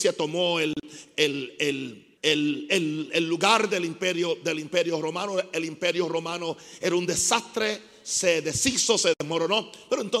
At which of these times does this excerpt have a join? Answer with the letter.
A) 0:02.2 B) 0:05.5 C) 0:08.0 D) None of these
A